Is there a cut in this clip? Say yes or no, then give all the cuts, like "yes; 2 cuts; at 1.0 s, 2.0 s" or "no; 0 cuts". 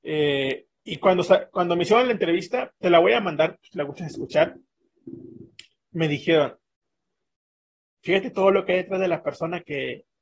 no; 0 cuts